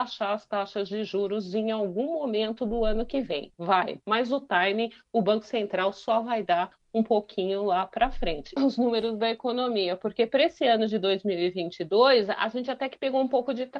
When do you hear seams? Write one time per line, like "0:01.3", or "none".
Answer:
0:03.5
0:08.6